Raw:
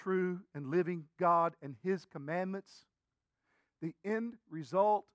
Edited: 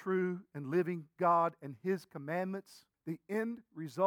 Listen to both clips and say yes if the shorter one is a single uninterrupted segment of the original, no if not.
no